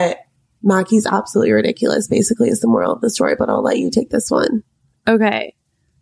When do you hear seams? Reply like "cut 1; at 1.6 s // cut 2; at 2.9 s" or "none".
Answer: none